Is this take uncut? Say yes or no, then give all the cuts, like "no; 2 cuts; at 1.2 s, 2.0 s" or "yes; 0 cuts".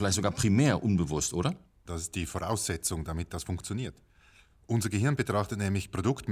no; 1 cut; at 1.9 s